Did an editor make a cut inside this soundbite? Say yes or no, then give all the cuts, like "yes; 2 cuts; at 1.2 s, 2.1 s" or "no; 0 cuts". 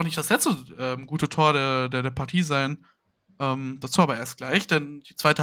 no; 0 cuts